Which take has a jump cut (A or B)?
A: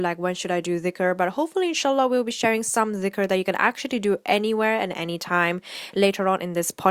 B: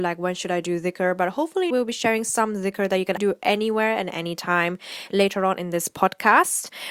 B